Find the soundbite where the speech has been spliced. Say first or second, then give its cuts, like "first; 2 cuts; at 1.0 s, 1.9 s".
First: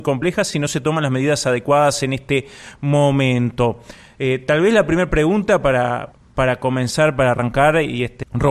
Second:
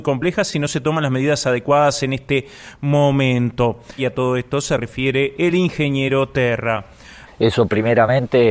second; 2 cuts; at 4.0 s, 7.3 s